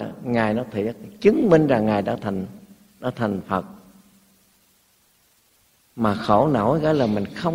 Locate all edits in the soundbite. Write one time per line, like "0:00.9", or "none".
none